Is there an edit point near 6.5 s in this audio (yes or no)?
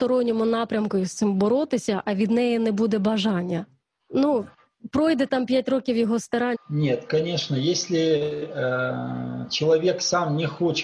yes